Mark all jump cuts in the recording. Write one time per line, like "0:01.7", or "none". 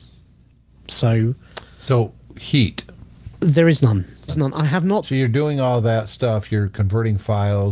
0:04.3